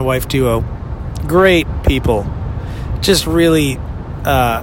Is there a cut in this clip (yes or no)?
no